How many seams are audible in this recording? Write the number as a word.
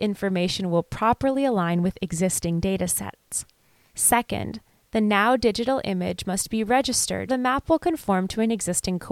two